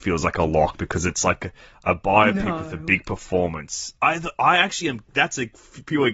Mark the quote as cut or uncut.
uncut